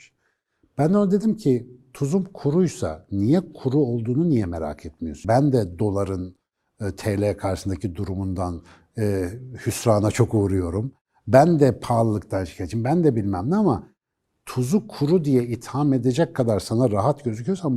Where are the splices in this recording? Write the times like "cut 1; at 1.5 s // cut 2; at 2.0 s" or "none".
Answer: cut 1; at 5.2 s